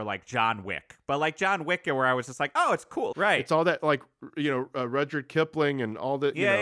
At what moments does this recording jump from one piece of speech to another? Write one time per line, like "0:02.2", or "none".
0:03.1